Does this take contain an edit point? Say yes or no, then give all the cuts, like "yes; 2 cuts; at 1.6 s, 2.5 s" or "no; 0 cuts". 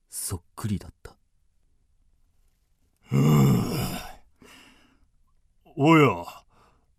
no; 0 cuts